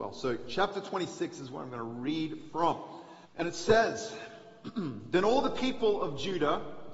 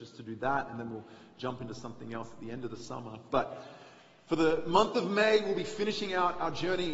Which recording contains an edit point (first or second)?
first